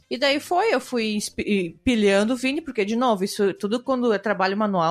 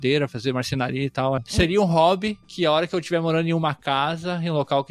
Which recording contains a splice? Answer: second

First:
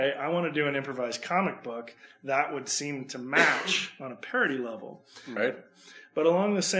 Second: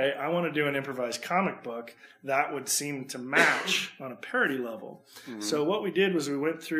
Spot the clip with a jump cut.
first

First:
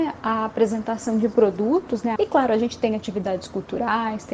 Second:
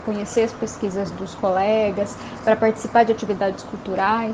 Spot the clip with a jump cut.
first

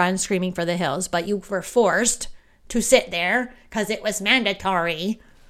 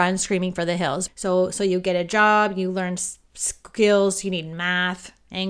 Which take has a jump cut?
second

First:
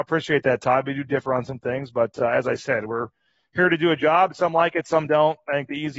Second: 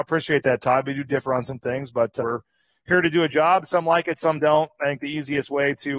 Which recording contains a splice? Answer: second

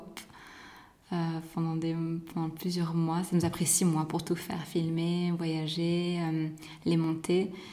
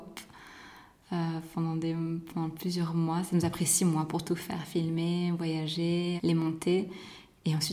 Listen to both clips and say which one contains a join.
second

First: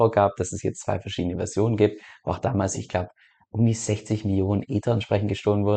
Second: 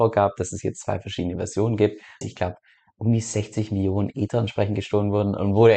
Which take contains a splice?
second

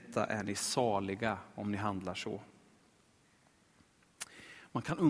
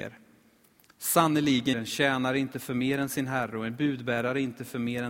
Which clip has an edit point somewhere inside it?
second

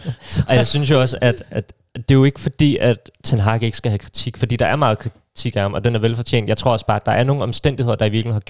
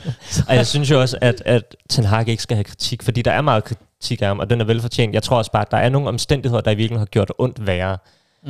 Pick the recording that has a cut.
second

